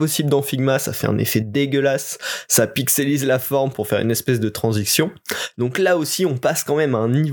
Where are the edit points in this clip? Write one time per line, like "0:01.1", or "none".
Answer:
0:05.5